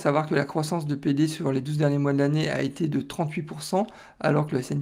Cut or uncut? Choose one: uncut